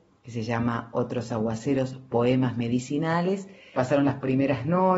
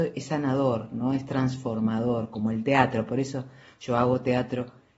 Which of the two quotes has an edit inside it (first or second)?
first